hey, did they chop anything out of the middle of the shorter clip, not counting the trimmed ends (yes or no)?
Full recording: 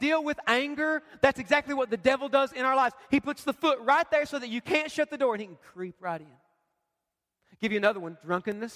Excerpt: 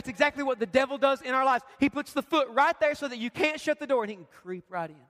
no